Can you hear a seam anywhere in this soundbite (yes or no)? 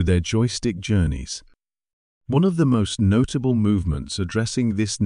yes